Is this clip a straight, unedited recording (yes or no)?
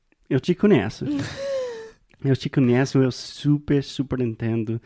yes